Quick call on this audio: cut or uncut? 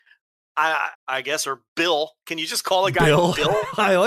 cut